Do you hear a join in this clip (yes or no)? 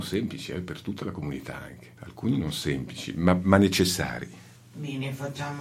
no